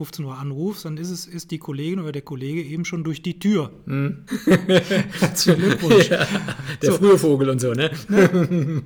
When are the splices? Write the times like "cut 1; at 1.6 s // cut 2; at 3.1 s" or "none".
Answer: cut 1; at 4.3 s